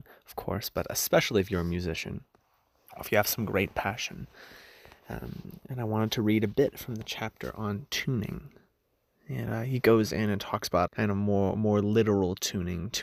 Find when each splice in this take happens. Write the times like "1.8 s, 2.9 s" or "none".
10.9 s